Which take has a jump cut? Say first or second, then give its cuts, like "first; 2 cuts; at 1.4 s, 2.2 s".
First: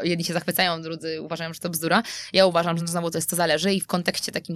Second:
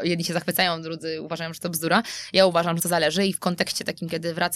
second; 1 cut; at 2.8 s